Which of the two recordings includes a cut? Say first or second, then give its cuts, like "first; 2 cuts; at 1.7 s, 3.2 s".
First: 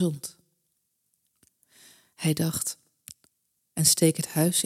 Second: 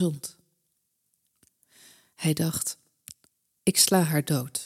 first; 1 cut; at 3.6 s